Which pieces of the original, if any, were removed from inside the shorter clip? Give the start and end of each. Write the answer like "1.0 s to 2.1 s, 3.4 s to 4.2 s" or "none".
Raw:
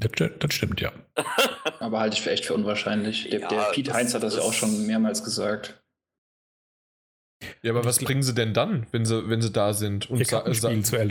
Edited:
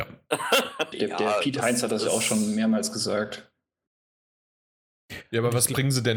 1.8 s to 3.2 s